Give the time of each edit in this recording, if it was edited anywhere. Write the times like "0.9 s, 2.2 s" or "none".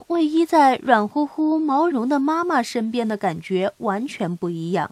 1.9 s